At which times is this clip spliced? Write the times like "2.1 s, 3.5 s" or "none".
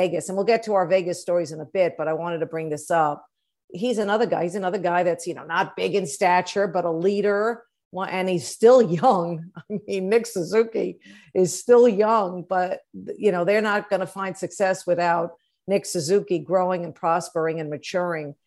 none